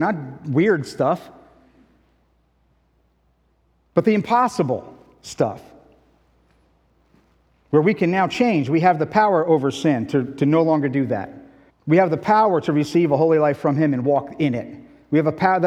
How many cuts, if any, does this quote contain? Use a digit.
1